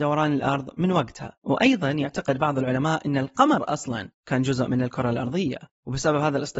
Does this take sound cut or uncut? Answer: cut